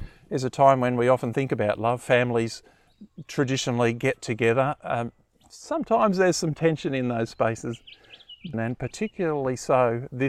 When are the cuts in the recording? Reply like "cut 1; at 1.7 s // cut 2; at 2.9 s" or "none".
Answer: cut 1; at 8.5 s

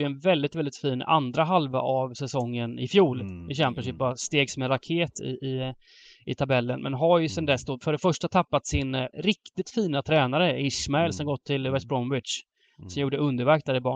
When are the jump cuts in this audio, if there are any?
cut 1; at 9.1 s

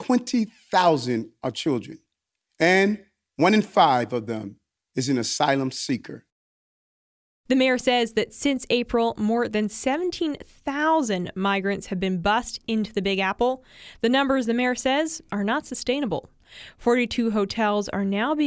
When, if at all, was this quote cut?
none

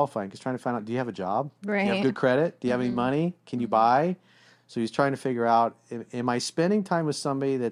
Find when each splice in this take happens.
none

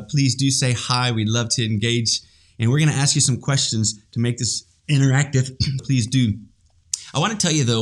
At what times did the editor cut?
cut 1; at 5.8 s

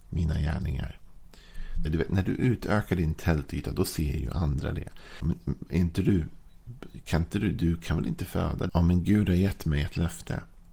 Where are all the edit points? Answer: cut 1; at 1.9 s // cut 2; at 5.2 s // cut 3; at 8.7 s

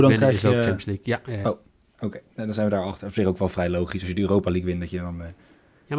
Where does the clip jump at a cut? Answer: cut 1; at 1.4 s

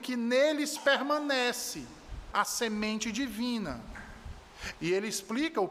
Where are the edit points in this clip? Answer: cut 1; at 2.3 s // cut 2; at 4.7 s

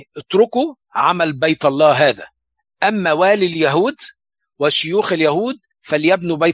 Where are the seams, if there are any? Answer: none

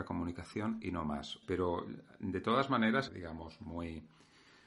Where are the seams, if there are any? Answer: cut 1; at 1.4 s // cut 2; at 3.1 s

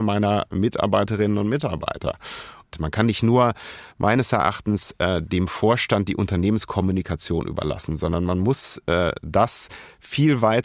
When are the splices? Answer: cut 1; at 2.7 s

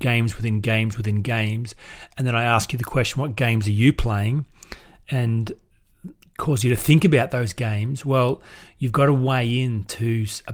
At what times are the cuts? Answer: none

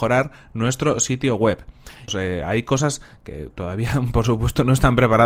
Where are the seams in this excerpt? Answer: cut 1; at 2.1 s

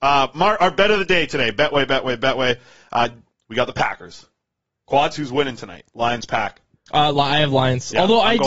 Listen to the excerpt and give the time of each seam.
cut 1; at 3.4 s

